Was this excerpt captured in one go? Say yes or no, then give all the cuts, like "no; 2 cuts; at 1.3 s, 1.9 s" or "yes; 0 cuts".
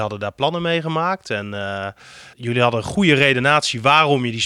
no; 1 cut; at 2.3 s